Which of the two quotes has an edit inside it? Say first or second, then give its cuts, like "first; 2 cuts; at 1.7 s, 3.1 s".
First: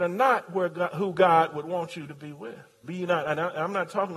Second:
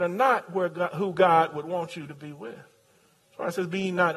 first; 1 cut; at 2.8 s